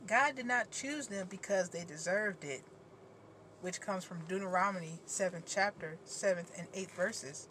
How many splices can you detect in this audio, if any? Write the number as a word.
zero